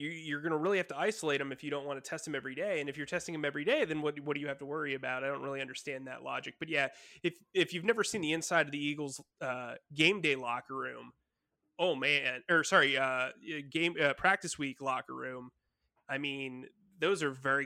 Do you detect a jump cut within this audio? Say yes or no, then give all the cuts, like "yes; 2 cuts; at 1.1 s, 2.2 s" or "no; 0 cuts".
no; 0 cuts